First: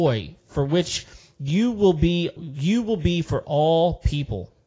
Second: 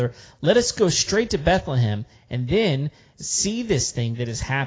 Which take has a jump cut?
first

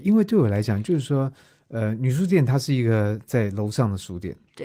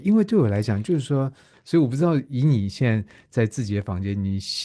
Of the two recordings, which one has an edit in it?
second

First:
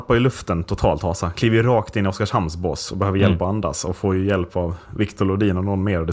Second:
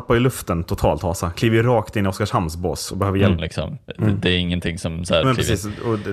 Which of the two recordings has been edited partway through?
second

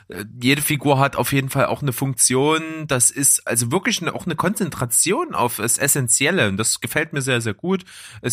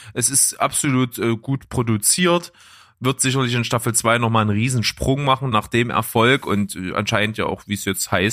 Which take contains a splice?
second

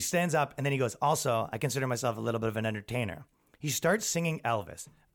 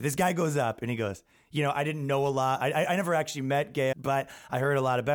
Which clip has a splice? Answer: second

